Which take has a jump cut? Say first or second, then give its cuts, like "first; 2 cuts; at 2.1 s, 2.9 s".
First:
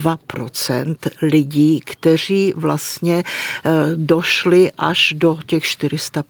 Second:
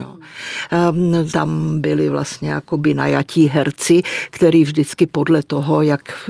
second; 1 cut; at 1.3 s